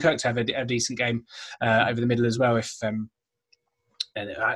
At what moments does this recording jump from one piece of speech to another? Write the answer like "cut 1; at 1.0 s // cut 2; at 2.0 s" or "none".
none